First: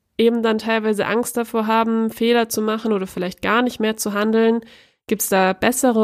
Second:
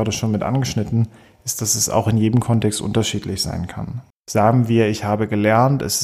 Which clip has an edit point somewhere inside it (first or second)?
second